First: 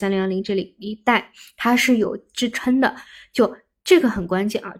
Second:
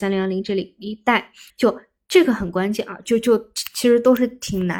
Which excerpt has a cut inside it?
second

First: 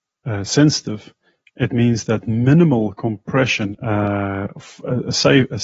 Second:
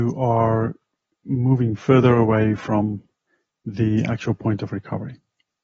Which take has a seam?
first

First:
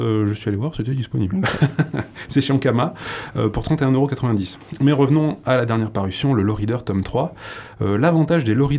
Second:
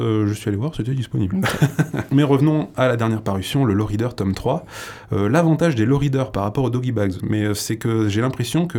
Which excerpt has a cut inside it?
second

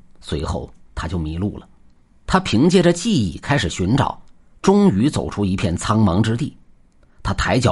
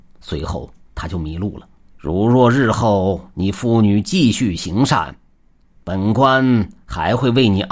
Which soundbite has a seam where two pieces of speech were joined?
second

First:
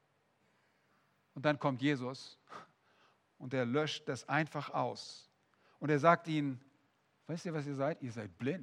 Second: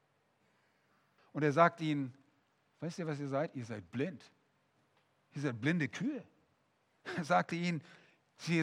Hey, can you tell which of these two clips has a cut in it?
second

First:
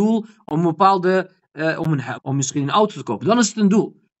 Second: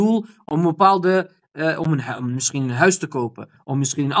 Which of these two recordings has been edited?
first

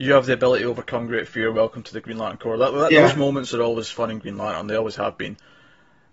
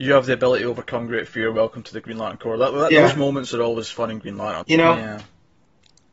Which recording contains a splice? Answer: second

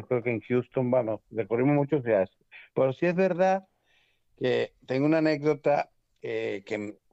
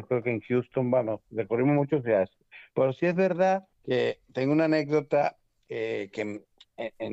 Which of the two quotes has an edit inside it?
second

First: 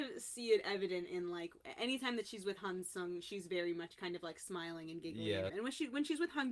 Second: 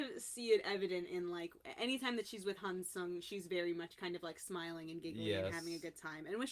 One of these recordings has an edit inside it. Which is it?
first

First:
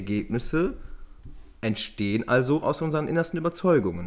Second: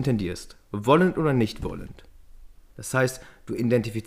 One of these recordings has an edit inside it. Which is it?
second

